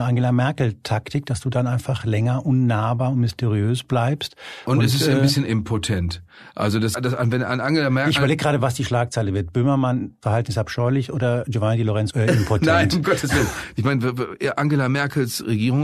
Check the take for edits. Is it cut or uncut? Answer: cut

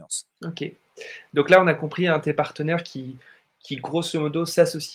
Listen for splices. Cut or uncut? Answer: uncut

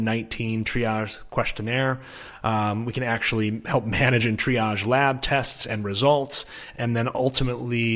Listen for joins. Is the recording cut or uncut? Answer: uncut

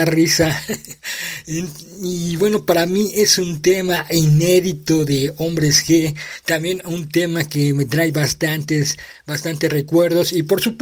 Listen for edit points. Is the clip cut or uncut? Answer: uncut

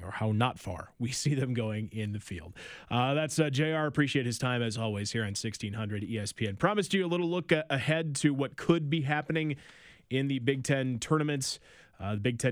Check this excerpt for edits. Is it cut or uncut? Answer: uncut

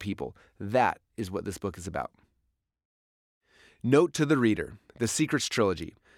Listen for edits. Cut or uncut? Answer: uncut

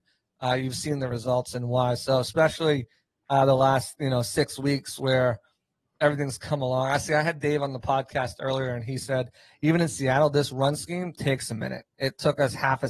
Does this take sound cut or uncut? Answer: uncut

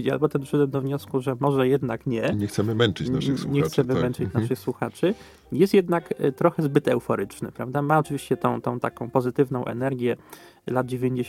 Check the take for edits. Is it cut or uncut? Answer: uncut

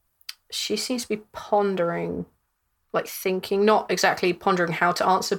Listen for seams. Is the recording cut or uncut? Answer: uncut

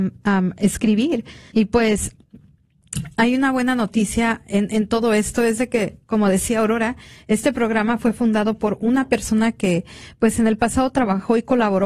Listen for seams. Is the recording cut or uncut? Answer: cut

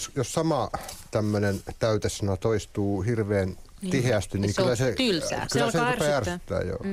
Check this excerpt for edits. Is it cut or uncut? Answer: uncut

